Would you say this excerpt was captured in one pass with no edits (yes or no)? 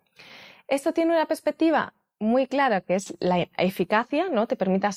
yes